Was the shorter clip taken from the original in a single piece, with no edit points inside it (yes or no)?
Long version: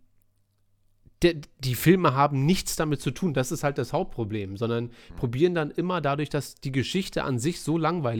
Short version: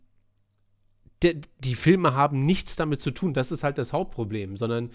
yes